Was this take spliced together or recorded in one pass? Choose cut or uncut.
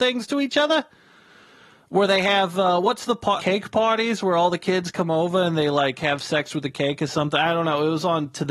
cut